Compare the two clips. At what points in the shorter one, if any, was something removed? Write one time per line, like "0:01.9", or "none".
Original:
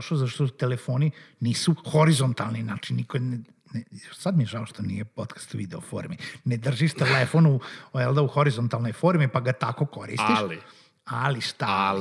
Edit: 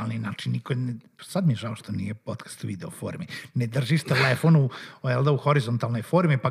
0:01.2